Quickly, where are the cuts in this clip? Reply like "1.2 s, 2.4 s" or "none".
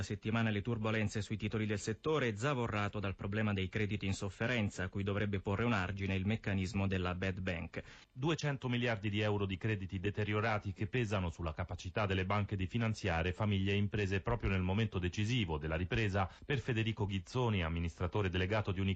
8.0 s

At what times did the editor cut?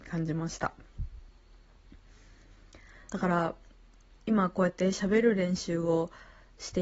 3.1 s

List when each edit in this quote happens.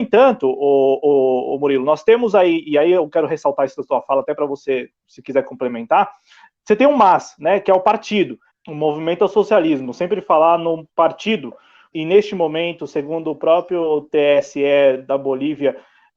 8.5 s, 11.9 s

